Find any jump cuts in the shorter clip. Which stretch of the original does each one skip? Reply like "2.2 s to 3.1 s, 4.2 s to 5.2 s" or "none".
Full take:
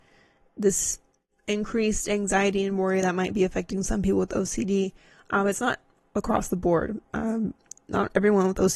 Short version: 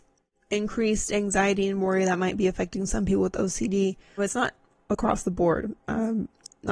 5.1 s to 5.4 s